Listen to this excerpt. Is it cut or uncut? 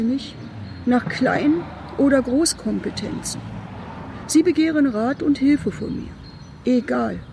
uncut